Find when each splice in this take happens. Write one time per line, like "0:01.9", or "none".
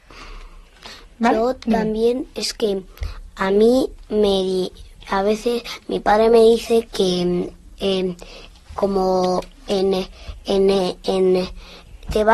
0:06.8
0:08.6